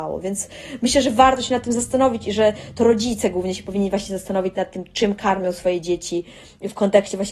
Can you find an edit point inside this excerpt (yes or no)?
no